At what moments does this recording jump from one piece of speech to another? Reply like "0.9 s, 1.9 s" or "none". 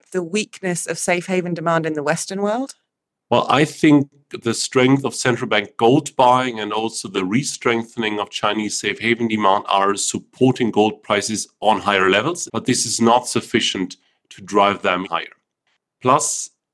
12.5 s, 15.0 s